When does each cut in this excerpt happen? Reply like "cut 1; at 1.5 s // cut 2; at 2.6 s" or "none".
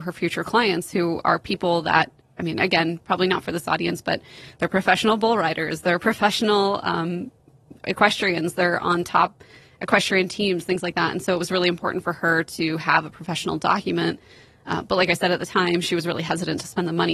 cut 1; at 7.8 s